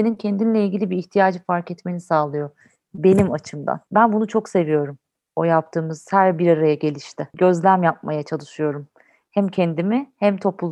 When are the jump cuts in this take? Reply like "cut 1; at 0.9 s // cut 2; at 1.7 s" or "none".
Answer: none